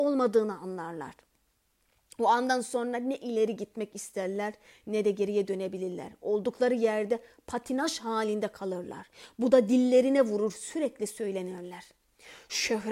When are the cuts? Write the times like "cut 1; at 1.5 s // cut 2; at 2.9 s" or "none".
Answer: none